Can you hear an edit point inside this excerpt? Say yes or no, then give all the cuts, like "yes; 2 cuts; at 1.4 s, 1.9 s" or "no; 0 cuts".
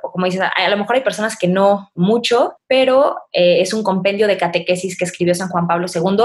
yes; 2 cuts; at 2.0 s, 3.3 s